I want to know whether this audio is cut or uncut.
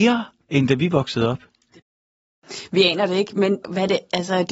cut